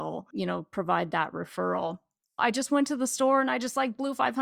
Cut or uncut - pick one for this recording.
cut